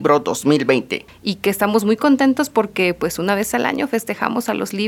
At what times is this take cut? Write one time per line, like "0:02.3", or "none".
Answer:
0:01.1